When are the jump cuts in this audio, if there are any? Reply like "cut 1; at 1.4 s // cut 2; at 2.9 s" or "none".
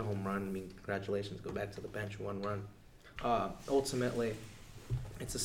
cut 1; at 3.2 s